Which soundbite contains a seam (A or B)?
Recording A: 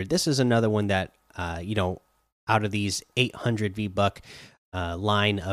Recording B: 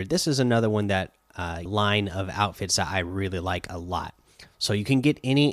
B